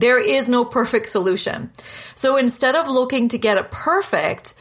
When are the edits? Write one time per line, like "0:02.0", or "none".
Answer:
0:02.1